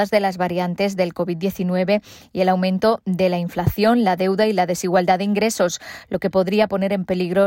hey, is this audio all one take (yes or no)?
yes